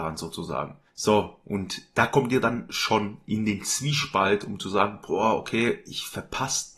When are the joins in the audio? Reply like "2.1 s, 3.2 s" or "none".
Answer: none